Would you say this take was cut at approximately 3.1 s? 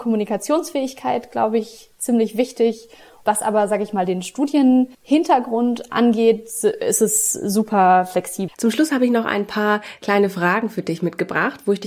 no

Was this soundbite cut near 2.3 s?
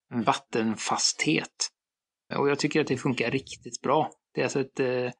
yes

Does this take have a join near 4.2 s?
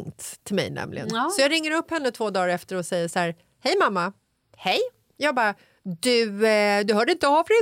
no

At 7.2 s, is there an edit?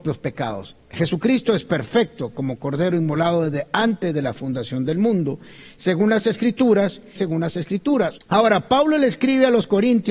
yes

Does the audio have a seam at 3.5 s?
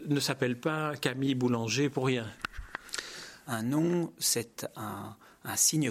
yes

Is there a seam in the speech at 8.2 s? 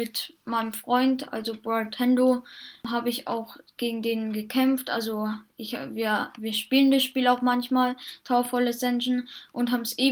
no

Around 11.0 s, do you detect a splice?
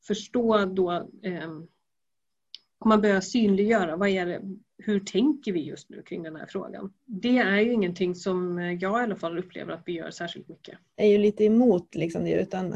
yes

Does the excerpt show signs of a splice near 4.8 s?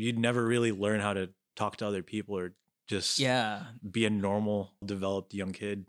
yes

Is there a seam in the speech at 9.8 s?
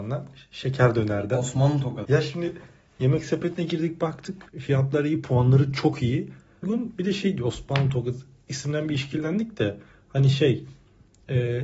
no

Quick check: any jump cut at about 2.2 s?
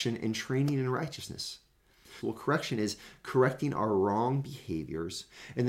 yes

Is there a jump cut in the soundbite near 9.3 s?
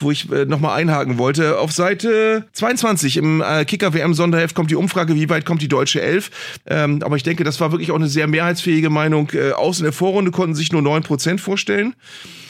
no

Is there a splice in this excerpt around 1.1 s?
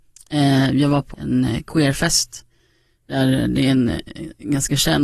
yes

